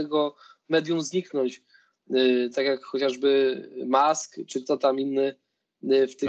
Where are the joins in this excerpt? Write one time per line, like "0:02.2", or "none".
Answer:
none